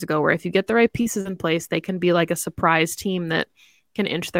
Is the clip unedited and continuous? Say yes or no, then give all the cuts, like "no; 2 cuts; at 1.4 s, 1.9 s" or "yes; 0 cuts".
yes; 0 cuts